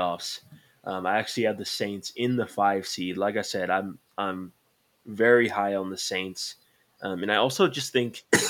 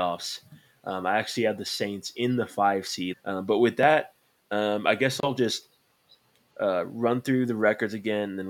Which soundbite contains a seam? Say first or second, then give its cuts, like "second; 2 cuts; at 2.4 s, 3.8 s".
second; 1 cut; at 3.1 s